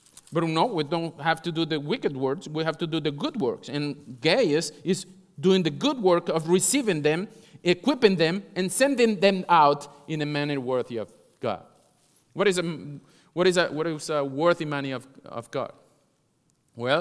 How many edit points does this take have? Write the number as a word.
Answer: zero